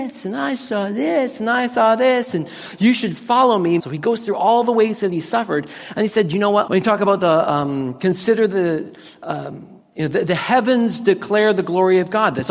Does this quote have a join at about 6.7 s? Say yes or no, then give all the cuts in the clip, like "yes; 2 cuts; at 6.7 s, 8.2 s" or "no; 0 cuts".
yes; 2 cuts; at 3.8 s, 6.7 s